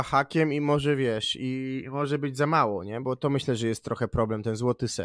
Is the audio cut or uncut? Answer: cut